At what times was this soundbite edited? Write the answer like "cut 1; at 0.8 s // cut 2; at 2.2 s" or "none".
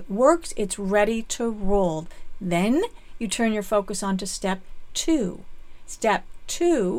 none